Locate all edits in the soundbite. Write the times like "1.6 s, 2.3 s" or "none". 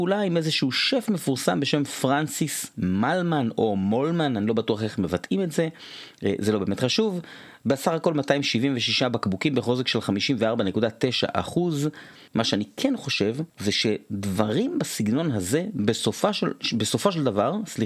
12.3 s, 13.5 s